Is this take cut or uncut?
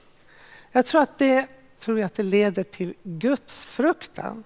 cut